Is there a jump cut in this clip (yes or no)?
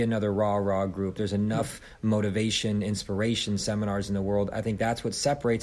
no